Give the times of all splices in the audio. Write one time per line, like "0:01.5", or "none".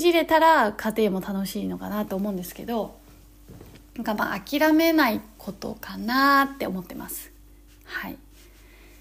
none